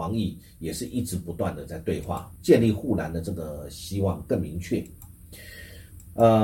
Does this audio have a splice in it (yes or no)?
yes